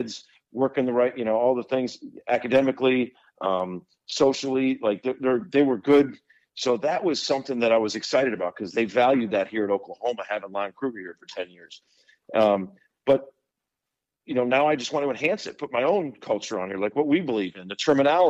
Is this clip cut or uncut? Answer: uncut